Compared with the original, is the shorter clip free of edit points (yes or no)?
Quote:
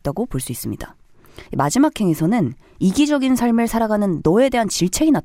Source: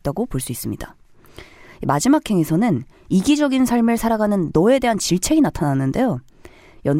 no